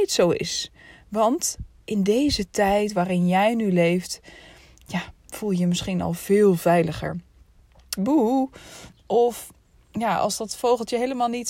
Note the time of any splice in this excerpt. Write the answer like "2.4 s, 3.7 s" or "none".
8.0 s